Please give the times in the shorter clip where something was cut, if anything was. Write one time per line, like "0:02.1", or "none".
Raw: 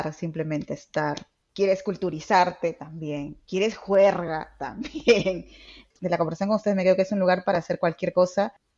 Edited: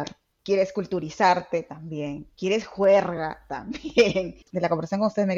0:04.4